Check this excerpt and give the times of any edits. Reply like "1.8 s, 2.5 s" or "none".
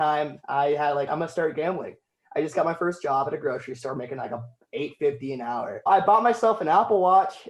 1.1 s, 5.9 s